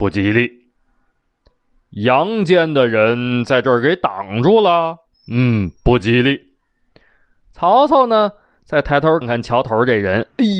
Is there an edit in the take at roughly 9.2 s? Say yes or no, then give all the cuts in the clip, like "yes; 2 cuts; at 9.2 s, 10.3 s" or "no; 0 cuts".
yes; 1 cut; at 9.2 s